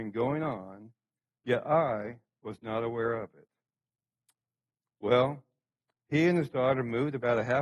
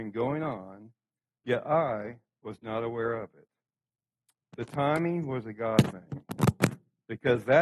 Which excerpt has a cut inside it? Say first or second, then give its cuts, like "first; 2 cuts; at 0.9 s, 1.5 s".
second; 1 cut; at 4.4 s